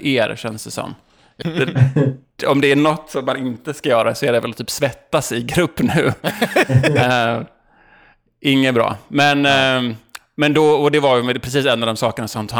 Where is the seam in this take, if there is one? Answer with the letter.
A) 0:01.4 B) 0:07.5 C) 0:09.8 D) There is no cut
A